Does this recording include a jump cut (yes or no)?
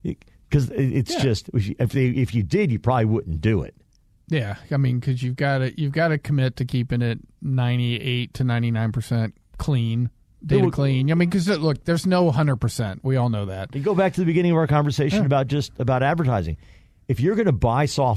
no